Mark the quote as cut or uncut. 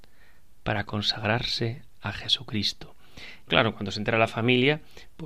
cut